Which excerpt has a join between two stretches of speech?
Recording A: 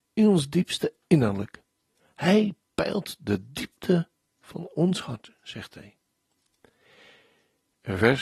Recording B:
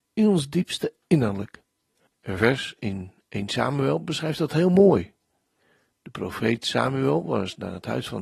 B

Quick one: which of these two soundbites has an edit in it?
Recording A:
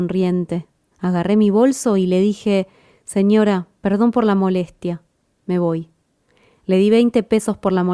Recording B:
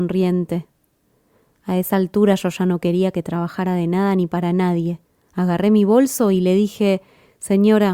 A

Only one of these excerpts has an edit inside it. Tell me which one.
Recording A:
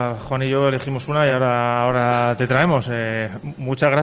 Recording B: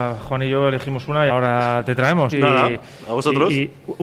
B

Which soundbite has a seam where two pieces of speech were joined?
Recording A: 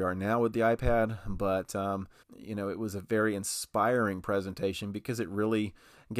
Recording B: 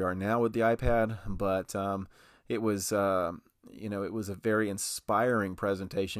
A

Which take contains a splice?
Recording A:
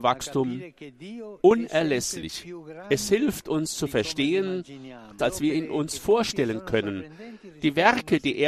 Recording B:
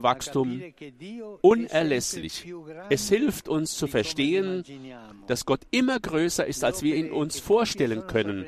A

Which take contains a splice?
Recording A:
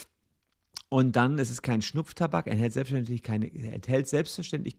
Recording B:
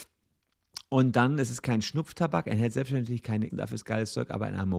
B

